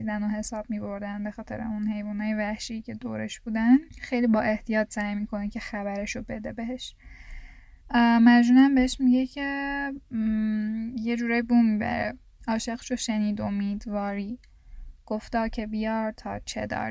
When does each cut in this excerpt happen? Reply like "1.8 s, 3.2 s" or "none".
3.9 s, 7.8 s